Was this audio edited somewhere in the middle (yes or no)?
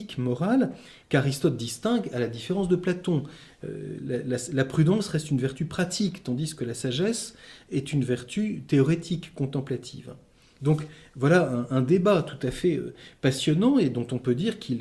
yes